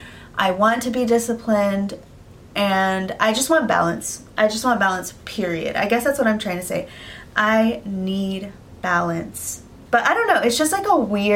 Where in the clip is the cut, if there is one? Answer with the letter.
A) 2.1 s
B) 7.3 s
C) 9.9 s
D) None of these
C